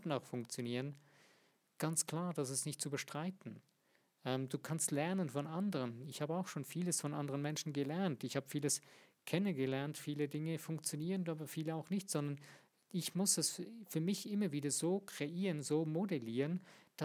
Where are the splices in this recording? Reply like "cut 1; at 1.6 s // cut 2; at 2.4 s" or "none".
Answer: none